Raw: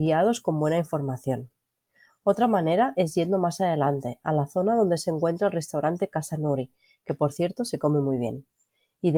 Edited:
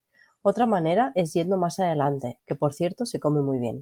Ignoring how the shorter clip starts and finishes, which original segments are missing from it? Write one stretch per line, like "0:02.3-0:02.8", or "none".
0:04.2-0:07.0